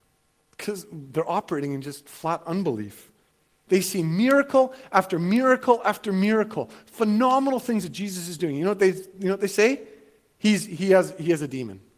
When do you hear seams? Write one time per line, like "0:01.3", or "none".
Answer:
0:03.7